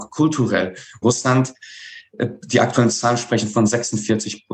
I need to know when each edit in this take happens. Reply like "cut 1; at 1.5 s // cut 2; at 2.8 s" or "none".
cut 1; at 1.0 s